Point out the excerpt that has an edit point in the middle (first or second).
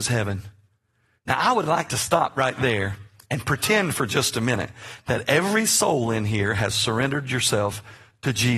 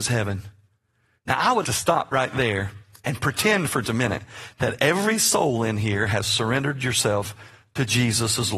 second